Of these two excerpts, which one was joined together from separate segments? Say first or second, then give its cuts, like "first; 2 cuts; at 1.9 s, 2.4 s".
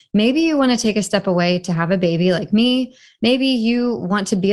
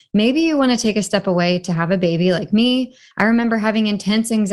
second; 1 cut; at 3.1 s